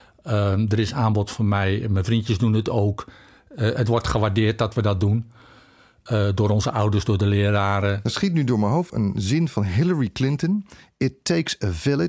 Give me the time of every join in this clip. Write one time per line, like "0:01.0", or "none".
0:08.9

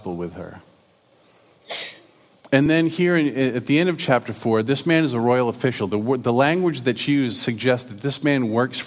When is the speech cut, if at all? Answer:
none

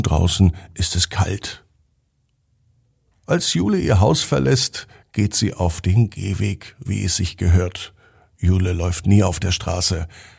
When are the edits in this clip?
0:06.9

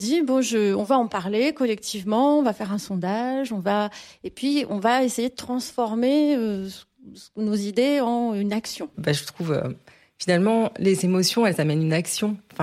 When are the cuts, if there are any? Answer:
0:08.9

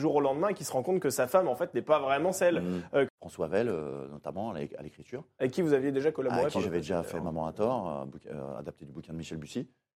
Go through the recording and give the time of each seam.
0:03.1

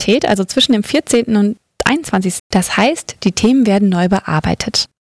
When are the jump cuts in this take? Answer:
0:02.4

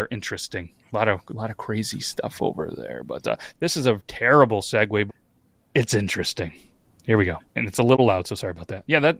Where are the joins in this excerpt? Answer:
0:03.5
0:05.1
0:07.5

